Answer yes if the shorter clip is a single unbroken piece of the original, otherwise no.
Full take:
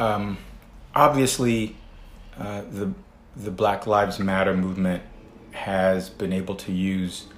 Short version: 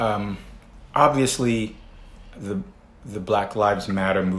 no